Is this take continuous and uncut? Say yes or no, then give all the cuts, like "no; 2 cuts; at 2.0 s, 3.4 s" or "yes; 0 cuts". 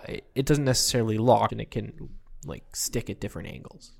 no; 1 cut; at 1.5 s